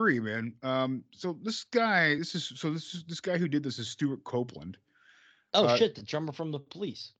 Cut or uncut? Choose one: uncut